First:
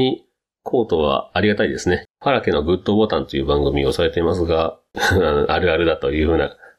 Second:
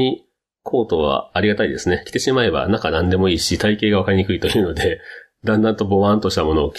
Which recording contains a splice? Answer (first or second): first